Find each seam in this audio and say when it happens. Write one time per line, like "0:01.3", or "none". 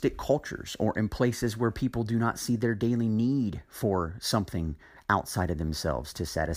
none